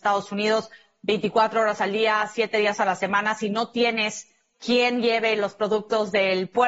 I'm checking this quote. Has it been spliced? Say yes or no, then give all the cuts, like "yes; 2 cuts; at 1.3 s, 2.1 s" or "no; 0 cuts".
no; 0 cuts